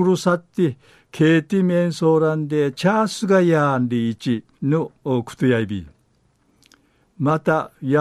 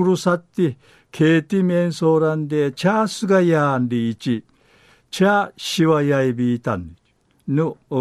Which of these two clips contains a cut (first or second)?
first